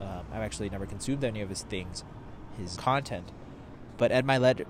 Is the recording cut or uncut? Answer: cut